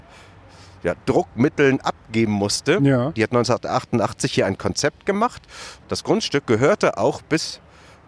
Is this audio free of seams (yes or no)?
no